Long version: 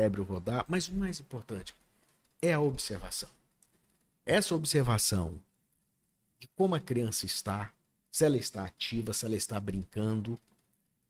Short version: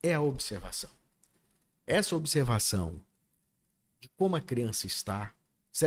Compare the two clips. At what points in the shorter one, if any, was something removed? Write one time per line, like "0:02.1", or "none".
none